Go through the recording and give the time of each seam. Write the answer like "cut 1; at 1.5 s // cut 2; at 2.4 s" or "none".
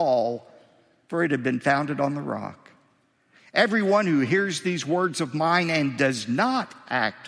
none